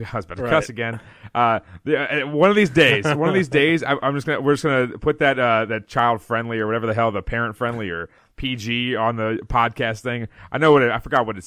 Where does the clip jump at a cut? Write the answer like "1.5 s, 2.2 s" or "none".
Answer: none